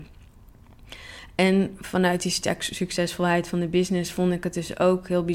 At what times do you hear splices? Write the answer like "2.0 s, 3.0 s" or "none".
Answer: none